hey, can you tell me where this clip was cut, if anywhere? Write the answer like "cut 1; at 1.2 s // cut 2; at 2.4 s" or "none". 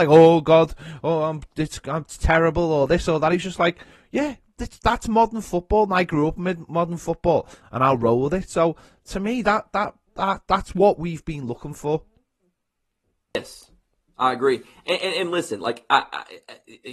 cut 1; at 7.6 s